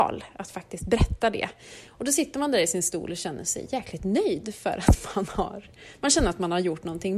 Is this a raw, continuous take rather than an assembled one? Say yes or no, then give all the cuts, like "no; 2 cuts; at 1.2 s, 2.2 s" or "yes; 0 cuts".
no; 1 cut; at 1.9 s